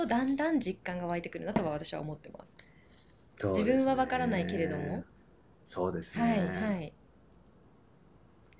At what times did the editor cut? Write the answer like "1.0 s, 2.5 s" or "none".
none